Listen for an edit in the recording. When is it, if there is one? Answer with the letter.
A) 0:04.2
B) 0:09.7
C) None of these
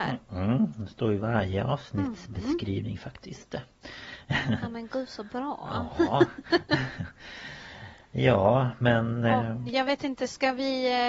B